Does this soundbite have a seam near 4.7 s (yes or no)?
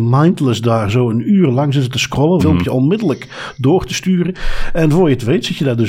no